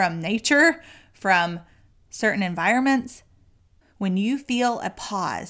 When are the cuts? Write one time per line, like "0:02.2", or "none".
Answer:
0:03.8